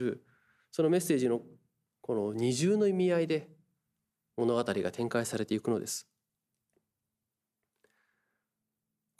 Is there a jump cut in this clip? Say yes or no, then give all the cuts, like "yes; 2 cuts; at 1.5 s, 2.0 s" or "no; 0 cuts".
no; 0 cuts